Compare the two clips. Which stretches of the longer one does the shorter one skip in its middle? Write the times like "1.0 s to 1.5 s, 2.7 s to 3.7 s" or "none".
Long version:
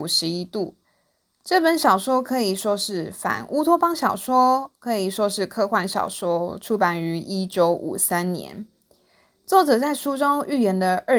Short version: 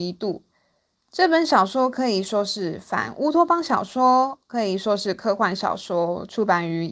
none

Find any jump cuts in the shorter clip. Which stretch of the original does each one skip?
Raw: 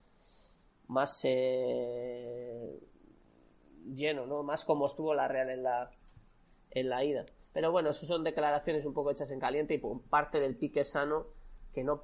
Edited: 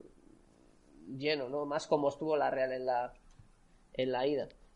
none

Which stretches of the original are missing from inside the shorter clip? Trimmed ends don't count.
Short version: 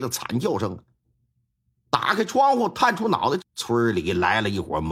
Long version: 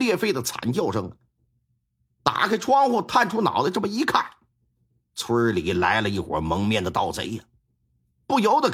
3.7 s to 5.0 s

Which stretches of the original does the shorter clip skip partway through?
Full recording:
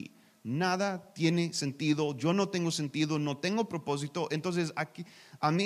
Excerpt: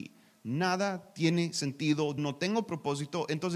2.2 s to 3.2 s

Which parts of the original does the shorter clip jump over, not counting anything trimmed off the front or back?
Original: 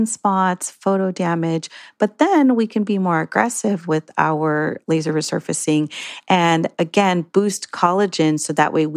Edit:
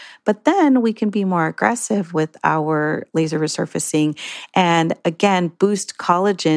none

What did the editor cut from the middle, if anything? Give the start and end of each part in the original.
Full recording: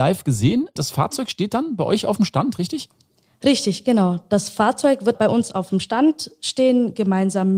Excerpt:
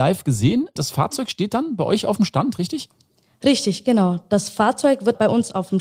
none

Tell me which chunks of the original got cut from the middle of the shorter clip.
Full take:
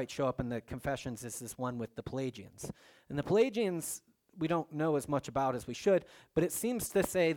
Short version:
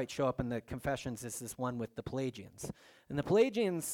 none

